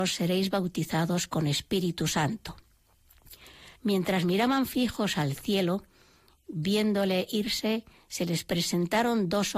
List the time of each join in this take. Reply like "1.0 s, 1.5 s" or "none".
3.8 s

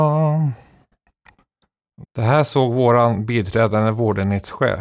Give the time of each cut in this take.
2.0 s

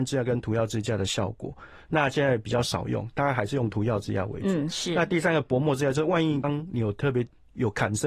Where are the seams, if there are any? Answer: 6.4 s

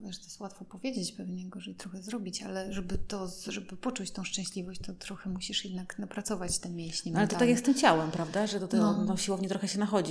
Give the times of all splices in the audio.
none

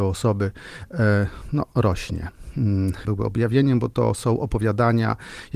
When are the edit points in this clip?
3.0 s

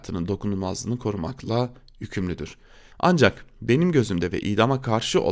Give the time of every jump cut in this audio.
2.9 s

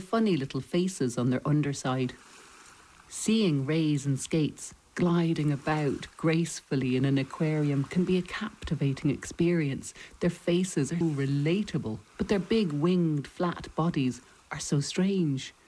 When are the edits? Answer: 11.0 s, 12.1 s

